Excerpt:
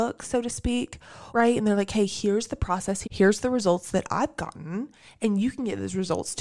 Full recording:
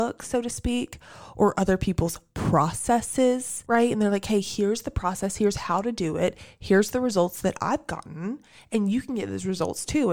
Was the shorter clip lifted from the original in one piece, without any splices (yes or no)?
no